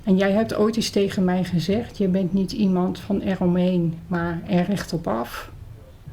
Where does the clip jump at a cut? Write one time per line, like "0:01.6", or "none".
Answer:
none